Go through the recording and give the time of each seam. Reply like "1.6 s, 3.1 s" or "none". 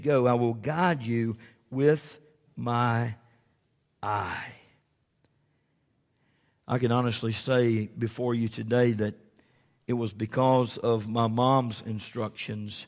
none